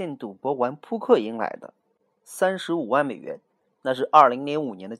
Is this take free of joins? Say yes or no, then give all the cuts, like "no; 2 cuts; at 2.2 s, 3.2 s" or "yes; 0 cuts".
no; 1 cut; at 2.2 s